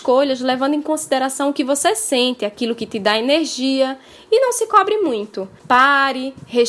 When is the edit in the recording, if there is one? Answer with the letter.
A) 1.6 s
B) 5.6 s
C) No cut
B